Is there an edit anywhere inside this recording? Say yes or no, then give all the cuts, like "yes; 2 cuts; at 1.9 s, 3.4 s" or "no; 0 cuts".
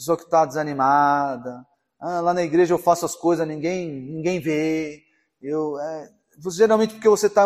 no; 0 cuts